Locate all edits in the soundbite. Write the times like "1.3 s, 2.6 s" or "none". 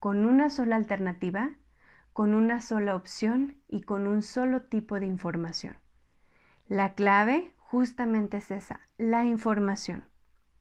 none